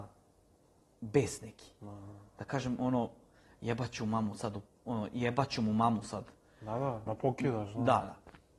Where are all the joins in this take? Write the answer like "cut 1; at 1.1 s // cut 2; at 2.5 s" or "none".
cut 1; at 7.1 s